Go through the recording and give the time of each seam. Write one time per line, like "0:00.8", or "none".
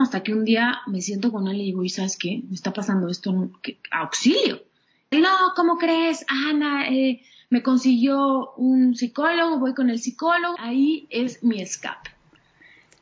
0:05.1
0:10.6